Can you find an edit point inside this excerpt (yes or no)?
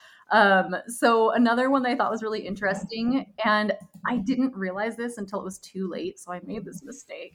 no